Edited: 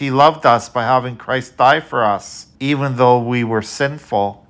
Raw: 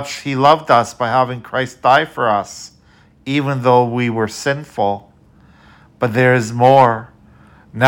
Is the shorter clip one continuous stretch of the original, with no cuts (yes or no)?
no